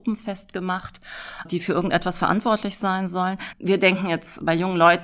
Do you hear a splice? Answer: yes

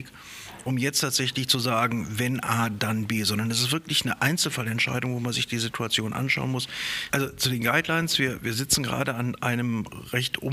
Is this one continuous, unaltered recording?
no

